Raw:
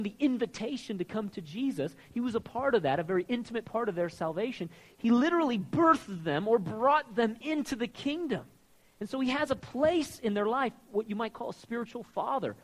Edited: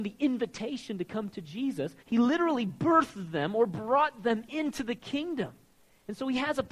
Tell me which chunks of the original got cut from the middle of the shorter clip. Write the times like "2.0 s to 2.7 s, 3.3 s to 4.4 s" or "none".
2.0 s to 4.9 s